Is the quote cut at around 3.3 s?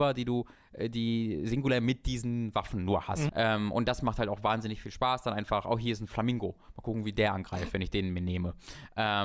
yes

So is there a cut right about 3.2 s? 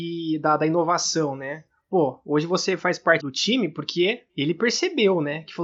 yes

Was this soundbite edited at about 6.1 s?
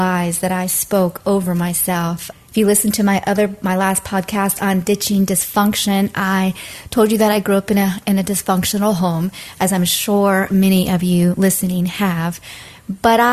no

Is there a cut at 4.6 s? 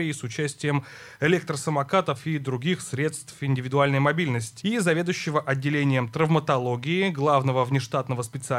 yes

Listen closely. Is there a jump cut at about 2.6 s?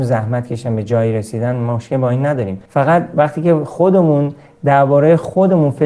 yes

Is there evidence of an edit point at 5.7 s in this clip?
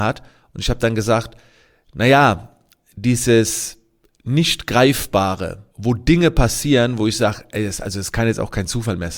yes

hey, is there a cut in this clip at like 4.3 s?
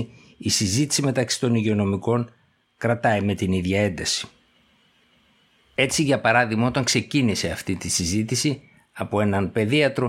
no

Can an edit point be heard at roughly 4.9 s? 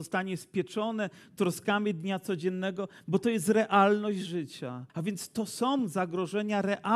yes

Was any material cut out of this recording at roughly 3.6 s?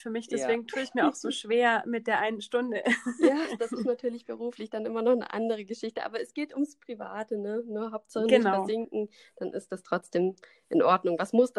yes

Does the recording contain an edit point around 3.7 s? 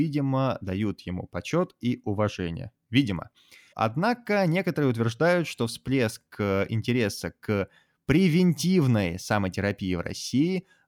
yes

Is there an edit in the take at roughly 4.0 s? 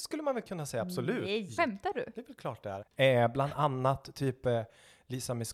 no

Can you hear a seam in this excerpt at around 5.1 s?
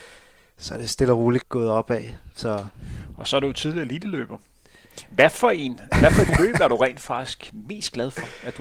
no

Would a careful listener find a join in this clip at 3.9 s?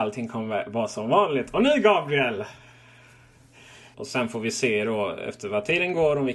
yes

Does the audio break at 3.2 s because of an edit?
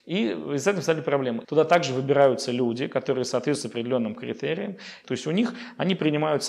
no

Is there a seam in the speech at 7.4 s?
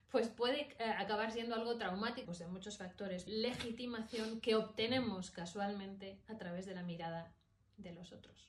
no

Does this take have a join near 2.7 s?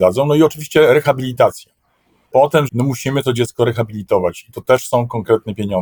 yes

